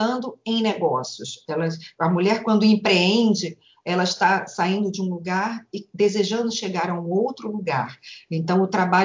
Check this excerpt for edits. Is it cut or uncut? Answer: uncut